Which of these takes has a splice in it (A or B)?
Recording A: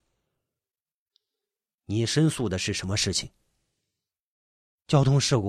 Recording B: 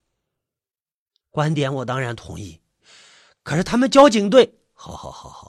B